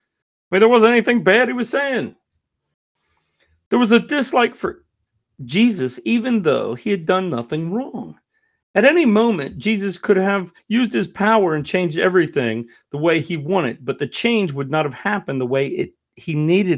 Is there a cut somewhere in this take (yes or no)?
no